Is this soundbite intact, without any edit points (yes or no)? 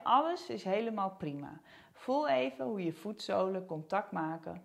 yes